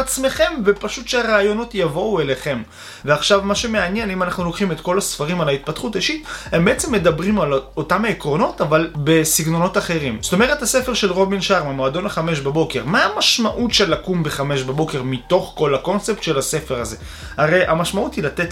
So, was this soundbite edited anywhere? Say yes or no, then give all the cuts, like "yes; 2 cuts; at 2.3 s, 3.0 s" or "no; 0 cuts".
yes; 1 cut; at 3.0 s